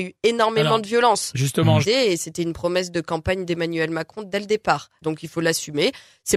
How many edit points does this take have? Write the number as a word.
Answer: two